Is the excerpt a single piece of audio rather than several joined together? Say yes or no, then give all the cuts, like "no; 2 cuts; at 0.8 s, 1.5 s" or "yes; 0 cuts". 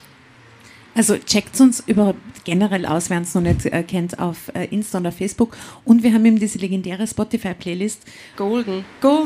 no; 1 cut; at 8.3 s